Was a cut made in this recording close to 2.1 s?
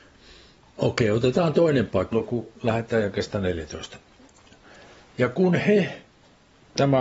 yes; 1 cut; at 2.1 s

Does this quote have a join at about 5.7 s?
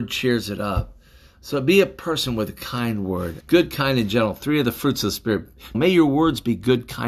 yes; 2 cuts; at 3.4 s, 5.7 s

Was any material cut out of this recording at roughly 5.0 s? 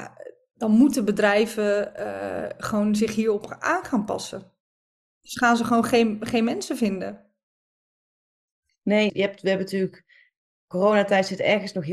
no; 1 cut; at 9.1 s

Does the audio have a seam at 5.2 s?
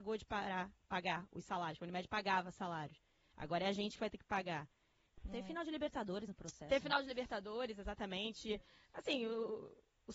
yes; 1 cut; at 5.2 s

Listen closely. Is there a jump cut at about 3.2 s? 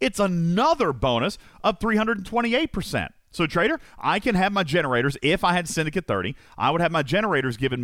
no; 0 cuts

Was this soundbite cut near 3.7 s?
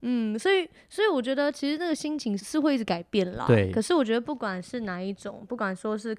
no; 1 cut; at 2.4 s

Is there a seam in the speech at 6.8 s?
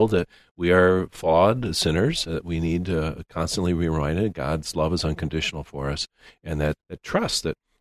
yes; 1 cut; at 6.8 s

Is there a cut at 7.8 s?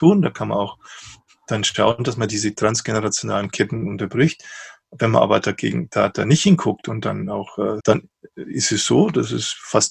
yes; 1 cut; at 7.8 s

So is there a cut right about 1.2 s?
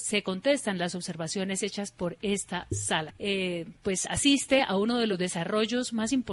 no; 1 cut; at 3.1 s

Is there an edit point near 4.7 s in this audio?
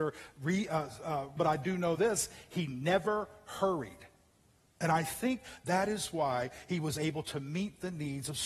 yes; 2 cuts; at 1.4 s, 4.7 s

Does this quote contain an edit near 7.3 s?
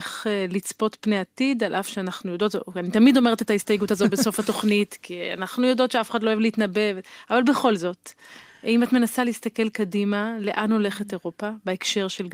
no; 0 cuts

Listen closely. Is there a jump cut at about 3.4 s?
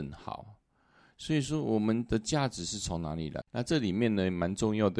yes; 1 cut; at 3.4 s

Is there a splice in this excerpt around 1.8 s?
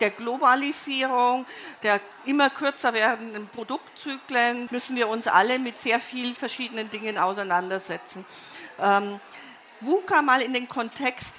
no; 1 cut; at 4.7 s

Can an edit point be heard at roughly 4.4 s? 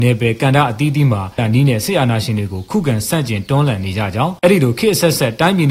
yes; 2 cuts; at 1.4 s, 4.4 s

